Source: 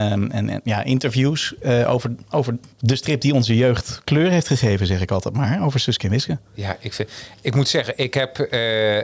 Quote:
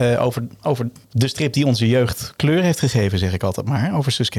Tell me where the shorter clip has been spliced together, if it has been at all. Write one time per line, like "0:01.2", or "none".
none